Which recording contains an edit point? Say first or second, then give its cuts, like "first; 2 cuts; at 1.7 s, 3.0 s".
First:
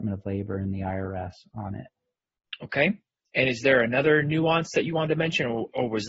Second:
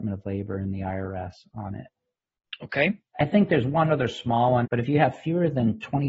second; 2 cuts; at 3.1 s, 4.6 s